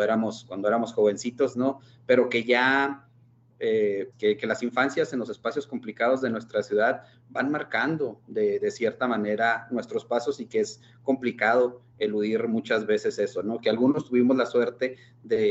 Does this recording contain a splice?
yes; 2 cuts; at 1.5 s, 4.1 s

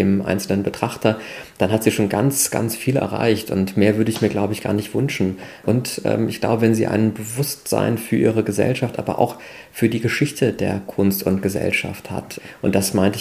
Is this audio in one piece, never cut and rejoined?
yes; 0 cuts

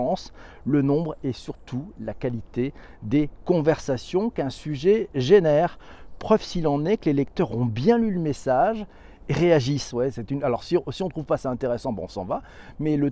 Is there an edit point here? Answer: yes; 1 cut; at 9.9 s

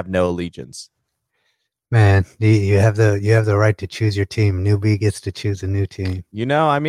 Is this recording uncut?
yes; 0 cuts

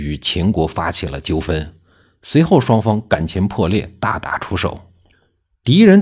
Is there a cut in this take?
no; 0 cuts

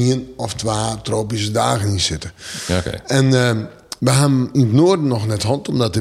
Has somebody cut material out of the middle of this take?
yes; 1 cut; at 4.0 s

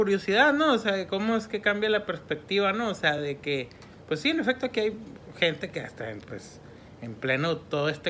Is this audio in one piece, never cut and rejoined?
yes; 0 cuts

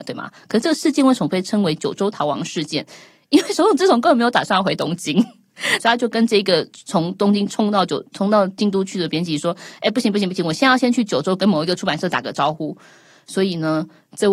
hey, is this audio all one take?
no; 1 cut; at 5.8 s

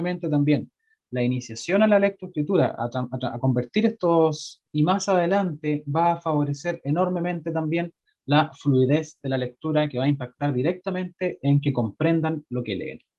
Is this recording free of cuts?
no; 2 cuts; at 2.8 s, 4.6 s

